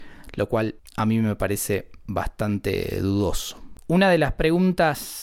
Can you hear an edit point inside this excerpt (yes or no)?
yes